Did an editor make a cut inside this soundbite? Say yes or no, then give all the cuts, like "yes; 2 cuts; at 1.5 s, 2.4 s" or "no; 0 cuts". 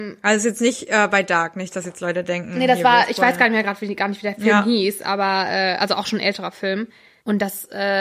no; 0 cuts